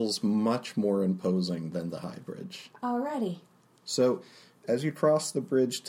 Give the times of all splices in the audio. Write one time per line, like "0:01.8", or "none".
none